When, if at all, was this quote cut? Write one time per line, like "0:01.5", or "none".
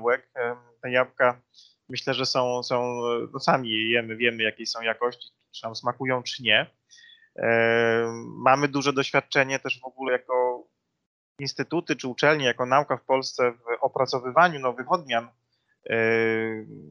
0:10.1